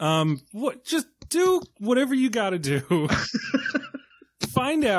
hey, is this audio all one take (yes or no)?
yes